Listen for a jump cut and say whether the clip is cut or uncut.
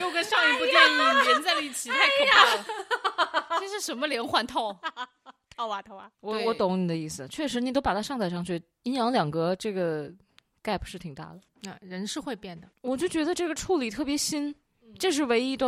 uncut